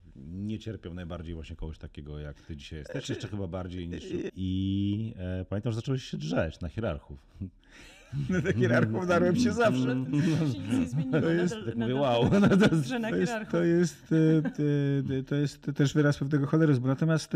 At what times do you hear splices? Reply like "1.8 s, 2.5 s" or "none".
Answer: 4.3 s